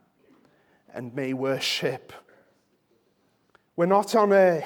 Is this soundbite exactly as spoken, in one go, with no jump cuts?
yes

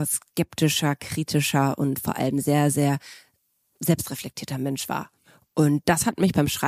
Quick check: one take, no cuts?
yes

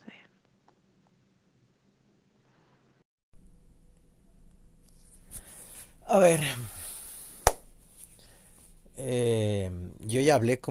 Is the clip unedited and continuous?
yes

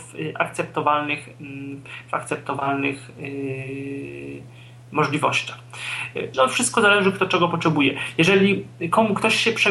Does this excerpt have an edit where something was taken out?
yes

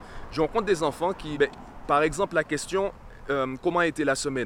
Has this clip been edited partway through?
yes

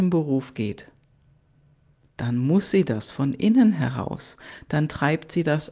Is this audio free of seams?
yes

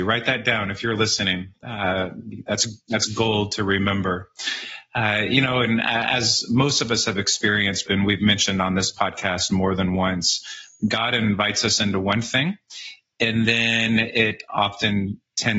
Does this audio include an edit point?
yes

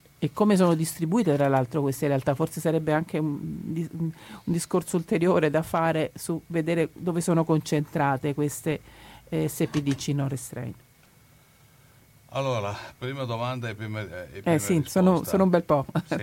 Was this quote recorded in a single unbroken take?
yes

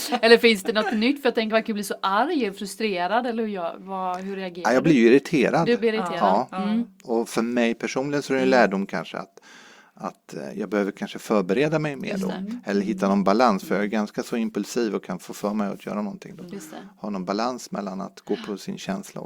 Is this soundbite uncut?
yes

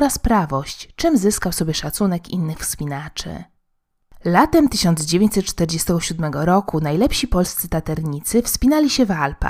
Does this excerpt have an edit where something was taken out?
no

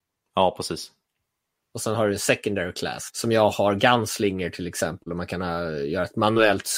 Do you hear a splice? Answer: yes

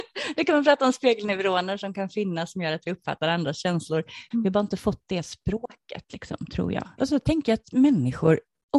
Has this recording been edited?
yes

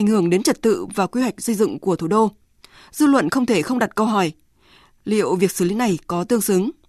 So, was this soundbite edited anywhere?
no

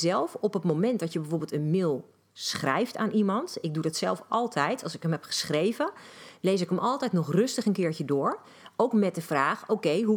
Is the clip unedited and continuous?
yes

